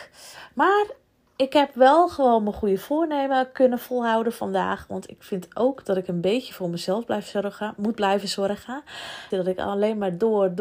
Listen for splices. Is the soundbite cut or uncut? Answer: cut